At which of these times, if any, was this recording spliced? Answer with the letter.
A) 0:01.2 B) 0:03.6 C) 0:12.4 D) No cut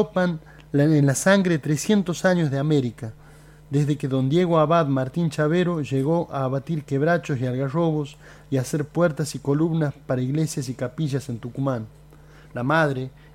C